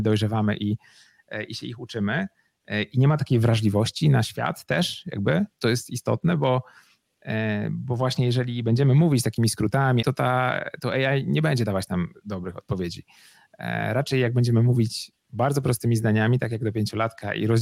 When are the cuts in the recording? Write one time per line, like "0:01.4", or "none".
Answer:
0:05.5
0:10.0